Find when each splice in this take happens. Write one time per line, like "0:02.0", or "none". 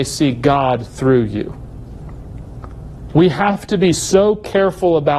none